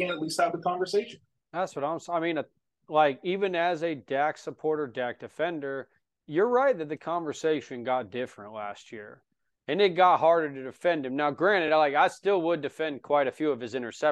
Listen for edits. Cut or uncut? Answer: uncut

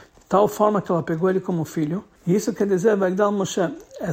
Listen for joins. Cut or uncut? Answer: cut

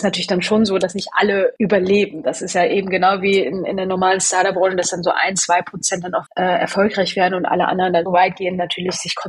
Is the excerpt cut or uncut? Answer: cut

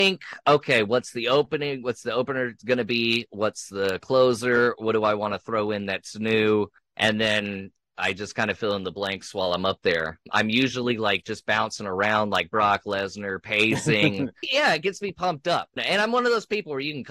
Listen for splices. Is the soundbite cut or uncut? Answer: uncut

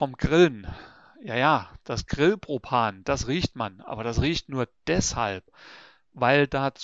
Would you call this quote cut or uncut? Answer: uncut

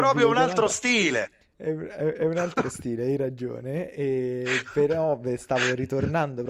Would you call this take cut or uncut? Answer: uncut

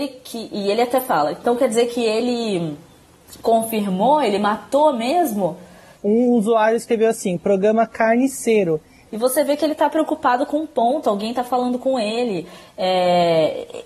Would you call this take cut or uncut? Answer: cut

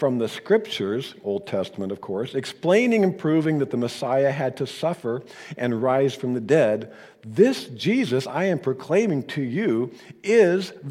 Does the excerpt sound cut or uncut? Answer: uncut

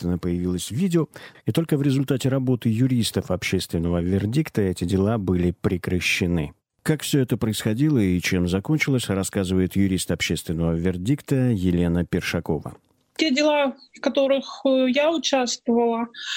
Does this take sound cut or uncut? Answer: cut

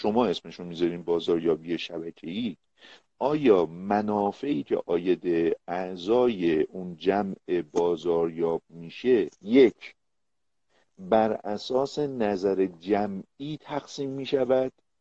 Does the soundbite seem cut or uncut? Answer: cut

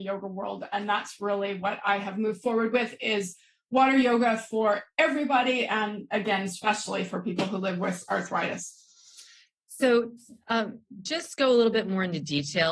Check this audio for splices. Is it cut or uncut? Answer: uncut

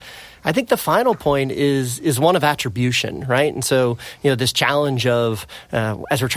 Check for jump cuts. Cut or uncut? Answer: uncut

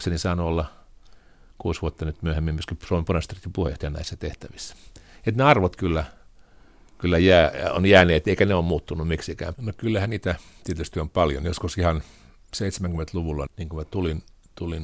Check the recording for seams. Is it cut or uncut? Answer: cut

